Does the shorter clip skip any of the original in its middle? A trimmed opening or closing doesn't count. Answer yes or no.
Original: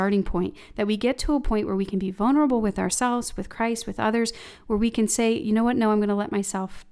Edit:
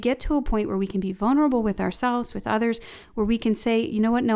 yes